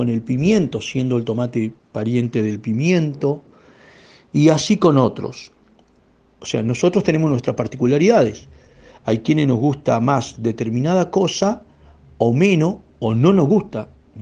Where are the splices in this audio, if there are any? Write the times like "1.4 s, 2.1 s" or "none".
6.4 s